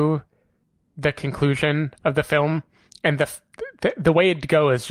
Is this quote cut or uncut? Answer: uncut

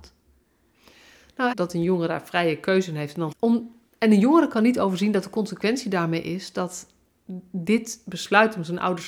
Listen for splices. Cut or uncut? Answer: cut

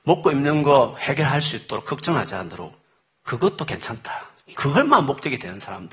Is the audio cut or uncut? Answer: cut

